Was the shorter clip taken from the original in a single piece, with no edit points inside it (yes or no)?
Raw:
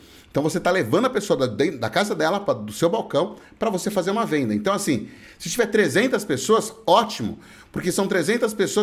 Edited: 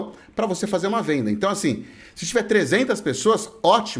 yes